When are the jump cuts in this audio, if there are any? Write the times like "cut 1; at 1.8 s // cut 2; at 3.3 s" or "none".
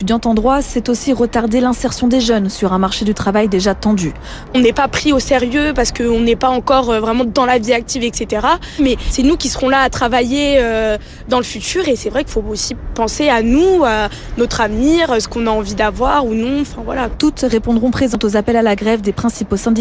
cut 1; at 4.5 s